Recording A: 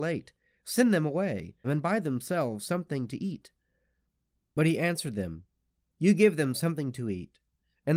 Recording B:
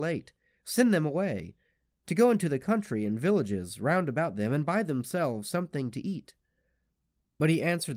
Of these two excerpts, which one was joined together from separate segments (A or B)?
A